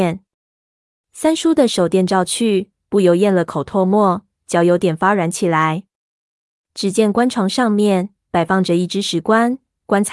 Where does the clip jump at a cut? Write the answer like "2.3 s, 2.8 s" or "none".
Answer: none